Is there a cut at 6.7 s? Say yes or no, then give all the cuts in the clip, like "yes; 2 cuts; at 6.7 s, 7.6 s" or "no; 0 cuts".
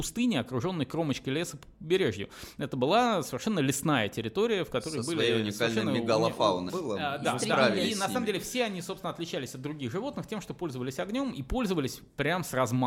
yes; 1 cut; at 6.7 s